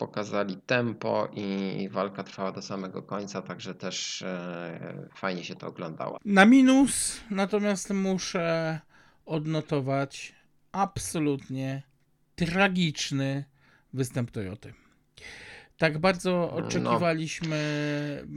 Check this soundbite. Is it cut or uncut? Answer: cut